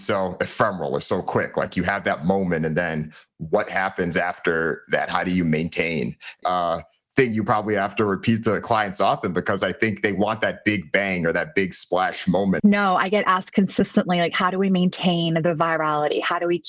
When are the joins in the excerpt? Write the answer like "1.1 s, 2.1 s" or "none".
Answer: 6.4 s, 12.6 s